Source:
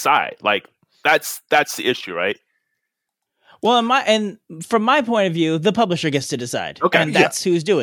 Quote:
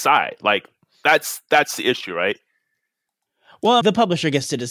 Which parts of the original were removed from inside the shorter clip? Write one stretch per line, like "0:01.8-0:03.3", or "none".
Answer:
0:03.8-0:05.6